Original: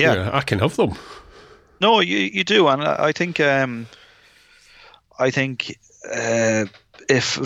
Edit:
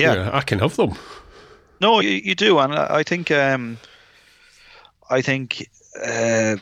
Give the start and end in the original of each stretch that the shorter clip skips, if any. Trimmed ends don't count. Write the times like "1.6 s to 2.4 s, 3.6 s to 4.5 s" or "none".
2.0 s to 2.1 s